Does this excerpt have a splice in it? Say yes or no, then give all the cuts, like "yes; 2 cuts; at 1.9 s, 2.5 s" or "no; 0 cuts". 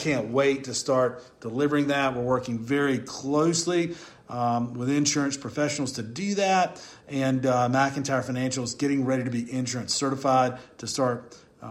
no; 0 cuts